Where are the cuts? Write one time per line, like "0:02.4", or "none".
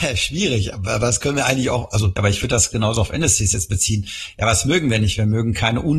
none